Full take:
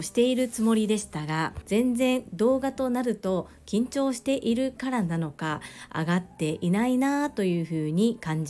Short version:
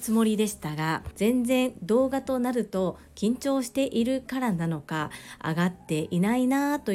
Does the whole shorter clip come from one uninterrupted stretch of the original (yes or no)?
yes